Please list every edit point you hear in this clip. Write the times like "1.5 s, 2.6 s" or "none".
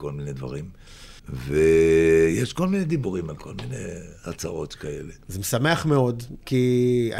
1.2 s